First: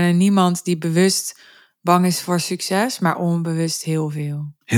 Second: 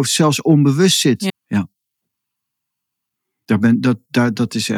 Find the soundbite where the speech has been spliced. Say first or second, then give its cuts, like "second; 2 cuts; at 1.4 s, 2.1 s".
second; 1 cut; at 1.3 s